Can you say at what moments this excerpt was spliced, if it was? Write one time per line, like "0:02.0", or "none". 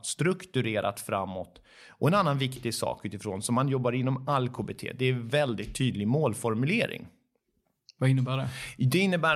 none